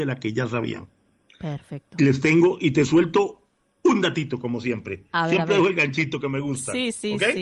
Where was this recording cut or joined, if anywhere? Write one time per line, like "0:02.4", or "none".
none